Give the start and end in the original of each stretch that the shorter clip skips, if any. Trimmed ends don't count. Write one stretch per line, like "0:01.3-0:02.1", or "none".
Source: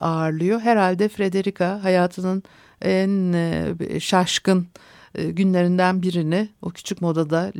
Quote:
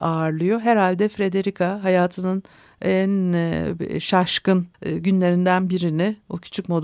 0:04.7-0:05.1